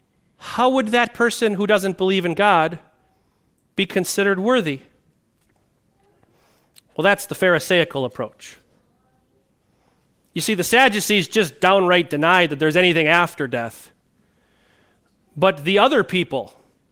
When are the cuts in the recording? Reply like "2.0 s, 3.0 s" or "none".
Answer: none